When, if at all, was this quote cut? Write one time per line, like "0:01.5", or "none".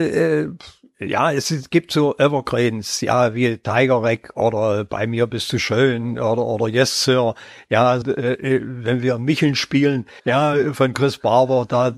0:08.0
0:10.2